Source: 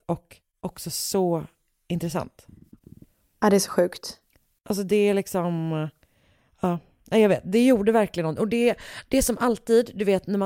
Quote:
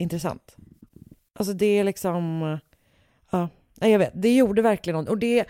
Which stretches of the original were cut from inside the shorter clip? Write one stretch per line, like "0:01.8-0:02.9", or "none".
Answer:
0:03.1-0:04.5